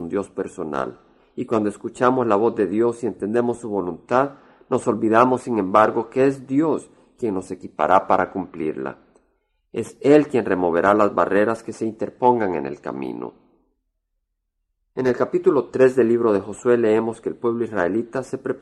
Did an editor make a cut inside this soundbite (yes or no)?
no